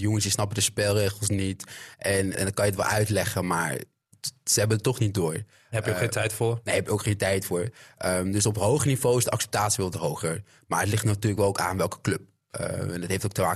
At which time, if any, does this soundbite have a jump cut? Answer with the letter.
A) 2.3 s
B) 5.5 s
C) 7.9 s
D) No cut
A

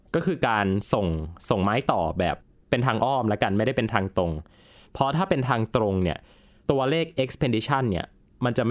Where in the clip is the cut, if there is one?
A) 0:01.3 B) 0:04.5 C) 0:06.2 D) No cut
D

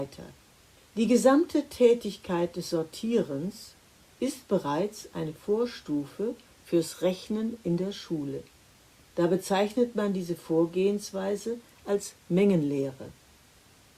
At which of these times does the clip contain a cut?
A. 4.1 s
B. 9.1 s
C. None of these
C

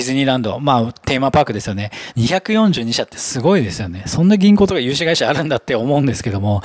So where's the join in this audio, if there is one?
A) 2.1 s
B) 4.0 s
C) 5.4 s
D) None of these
A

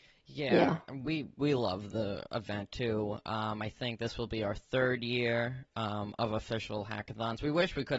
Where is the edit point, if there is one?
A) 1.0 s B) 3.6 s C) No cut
C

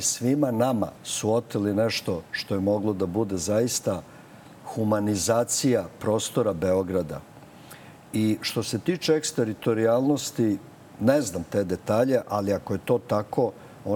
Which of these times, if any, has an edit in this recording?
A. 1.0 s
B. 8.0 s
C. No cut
A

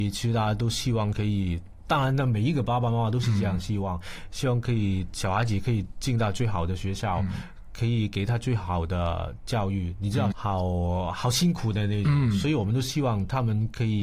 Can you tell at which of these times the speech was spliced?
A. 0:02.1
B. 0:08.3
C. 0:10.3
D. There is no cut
C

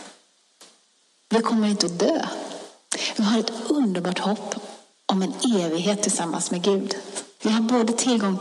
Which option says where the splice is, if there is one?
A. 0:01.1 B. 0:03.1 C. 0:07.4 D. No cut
C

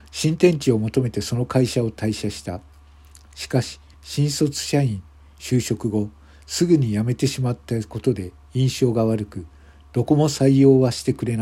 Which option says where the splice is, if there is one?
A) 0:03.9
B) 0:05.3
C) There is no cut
A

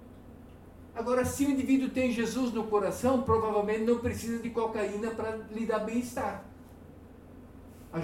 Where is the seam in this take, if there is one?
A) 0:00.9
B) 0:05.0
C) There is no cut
A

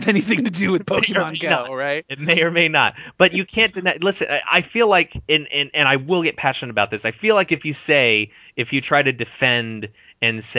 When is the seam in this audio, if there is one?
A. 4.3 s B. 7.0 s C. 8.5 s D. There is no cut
D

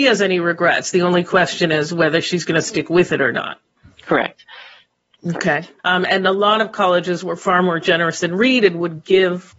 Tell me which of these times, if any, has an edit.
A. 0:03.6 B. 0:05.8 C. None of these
B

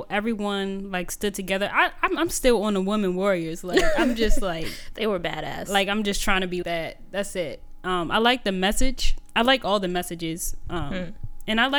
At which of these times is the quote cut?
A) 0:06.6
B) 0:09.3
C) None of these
A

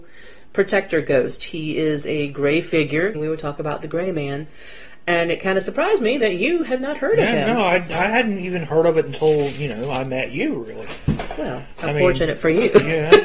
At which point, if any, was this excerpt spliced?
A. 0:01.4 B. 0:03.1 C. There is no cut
B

